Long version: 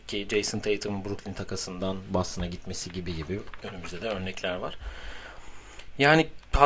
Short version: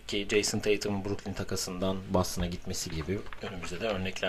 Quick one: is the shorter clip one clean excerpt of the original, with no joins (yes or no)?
no